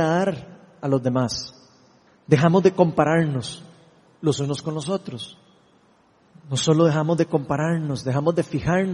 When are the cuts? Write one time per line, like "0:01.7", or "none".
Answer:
0:02.1